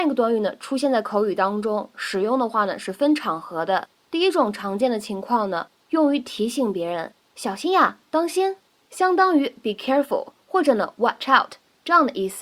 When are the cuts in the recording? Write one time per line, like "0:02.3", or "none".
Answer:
none